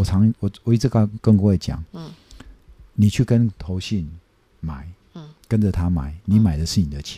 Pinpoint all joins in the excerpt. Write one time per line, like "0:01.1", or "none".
none